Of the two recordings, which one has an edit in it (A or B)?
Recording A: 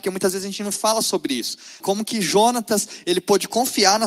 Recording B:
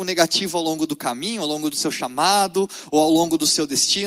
A